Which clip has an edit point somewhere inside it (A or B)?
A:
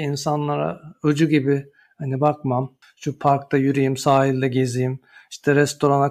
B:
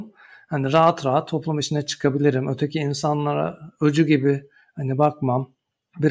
A